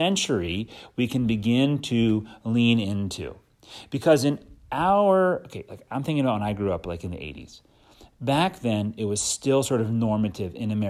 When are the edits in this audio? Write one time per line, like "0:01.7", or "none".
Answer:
none